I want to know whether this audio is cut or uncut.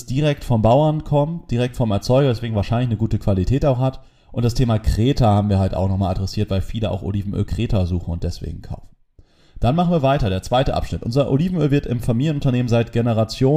uncut